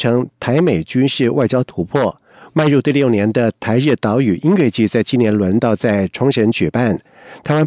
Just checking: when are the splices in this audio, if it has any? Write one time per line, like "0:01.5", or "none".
0:02.5